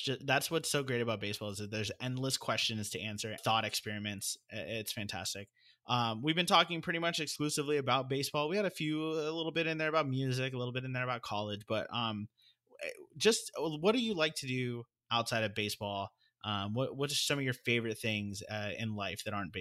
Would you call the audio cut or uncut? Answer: cut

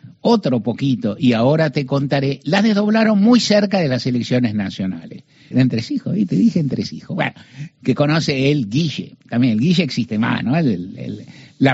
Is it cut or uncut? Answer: cut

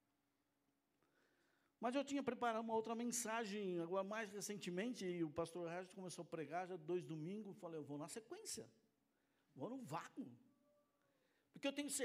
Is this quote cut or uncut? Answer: uncut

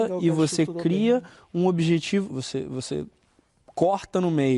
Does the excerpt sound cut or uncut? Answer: cut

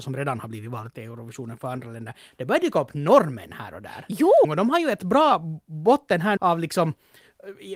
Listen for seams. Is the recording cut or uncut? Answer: cut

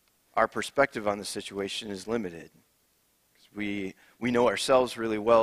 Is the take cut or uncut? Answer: uncut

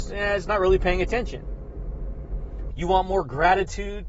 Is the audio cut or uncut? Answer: cut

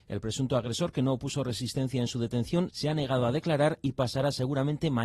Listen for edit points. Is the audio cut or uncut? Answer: cut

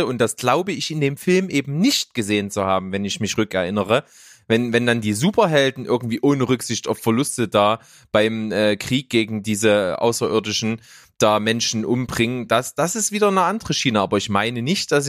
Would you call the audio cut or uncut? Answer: uncut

